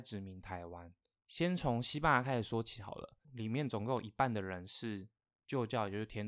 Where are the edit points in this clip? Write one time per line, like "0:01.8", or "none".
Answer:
0:01.1
0:03.2